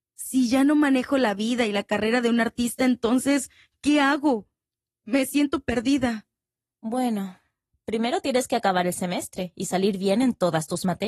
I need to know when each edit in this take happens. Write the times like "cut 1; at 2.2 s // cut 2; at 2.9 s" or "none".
none